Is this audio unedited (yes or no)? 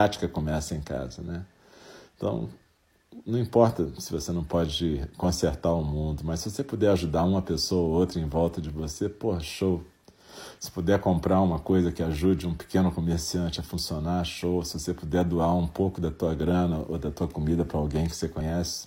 yes